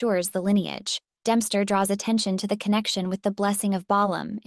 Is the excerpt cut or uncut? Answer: cut